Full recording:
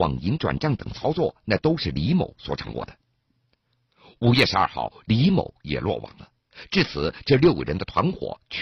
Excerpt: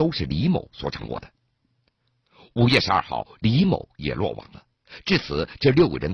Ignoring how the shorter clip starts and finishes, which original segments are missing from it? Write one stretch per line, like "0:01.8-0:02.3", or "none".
none